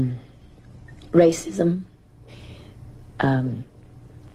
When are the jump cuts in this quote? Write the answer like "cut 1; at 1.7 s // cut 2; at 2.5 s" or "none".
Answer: cut 1; at 2.3 s